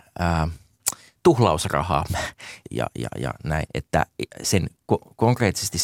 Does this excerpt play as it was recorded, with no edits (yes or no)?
no